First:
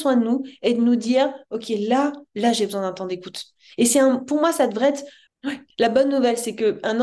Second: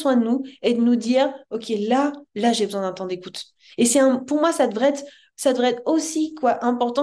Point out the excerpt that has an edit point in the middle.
first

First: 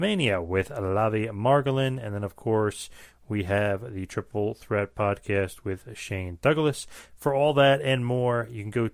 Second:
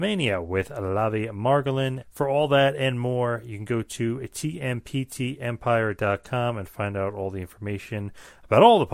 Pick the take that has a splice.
second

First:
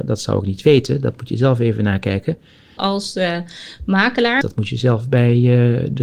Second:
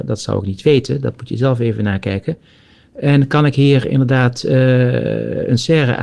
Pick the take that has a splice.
first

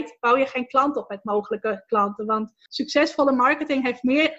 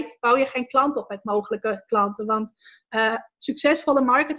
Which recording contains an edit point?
first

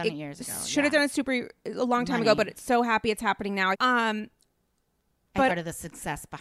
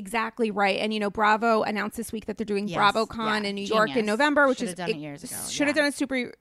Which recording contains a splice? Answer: first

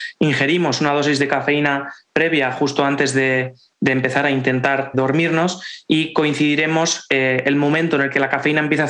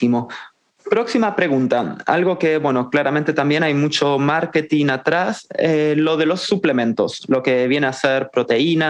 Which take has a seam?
first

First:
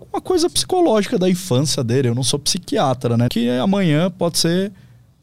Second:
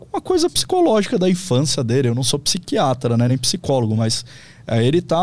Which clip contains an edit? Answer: first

